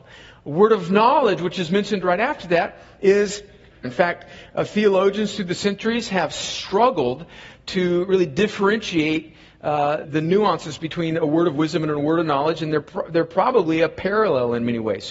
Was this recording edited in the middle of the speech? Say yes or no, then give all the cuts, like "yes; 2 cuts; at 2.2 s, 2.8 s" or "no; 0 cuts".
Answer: yes; 2 cuts; at 3.8 s, 10.0 s